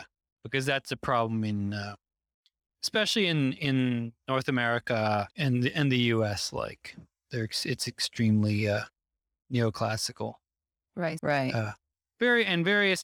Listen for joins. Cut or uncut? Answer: cut